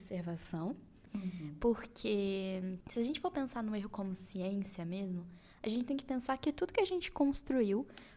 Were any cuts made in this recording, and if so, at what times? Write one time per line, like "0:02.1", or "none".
0:01.1